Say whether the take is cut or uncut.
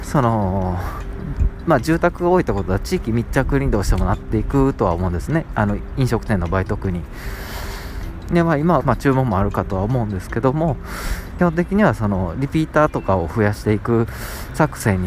cut